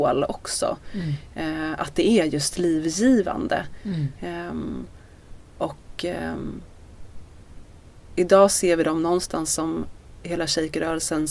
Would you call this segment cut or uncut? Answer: uncut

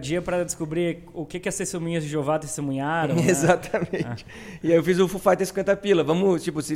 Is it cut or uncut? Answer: uncut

